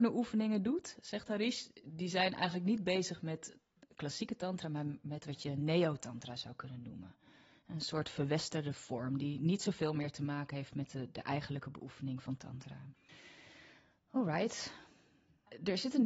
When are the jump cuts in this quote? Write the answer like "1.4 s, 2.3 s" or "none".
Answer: none